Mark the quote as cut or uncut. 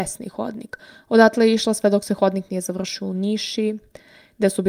uncut